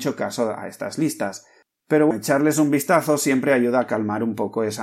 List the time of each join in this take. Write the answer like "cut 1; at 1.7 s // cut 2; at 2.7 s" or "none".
cut 1; at 2.1 s